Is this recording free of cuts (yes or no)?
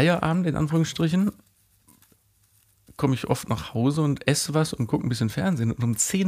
yes